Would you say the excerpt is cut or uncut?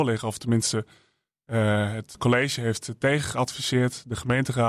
cut